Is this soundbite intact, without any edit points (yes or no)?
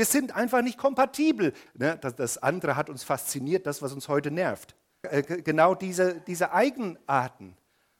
no